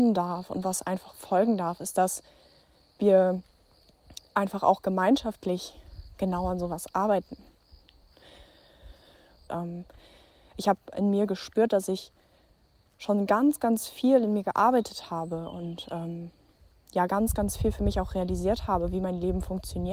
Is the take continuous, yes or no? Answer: no